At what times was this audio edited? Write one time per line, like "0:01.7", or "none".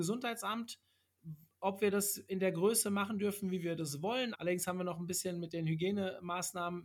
0:04.3